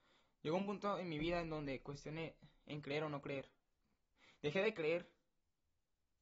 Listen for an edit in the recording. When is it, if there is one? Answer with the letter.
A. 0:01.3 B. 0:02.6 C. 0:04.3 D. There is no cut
D